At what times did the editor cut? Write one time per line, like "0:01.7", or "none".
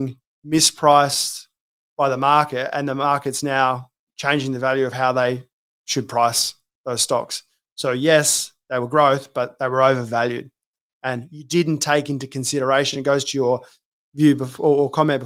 none